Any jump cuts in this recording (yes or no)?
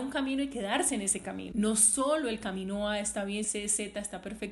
yes